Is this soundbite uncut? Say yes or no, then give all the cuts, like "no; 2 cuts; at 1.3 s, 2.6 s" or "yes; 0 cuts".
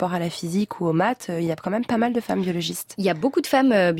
yes; 0 cuts